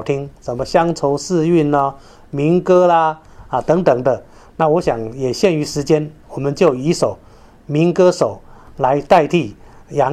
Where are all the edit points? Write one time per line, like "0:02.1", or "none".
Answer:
none